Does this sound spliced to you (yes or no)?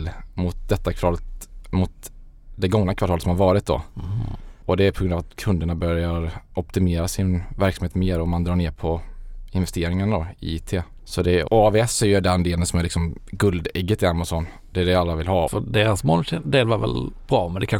yes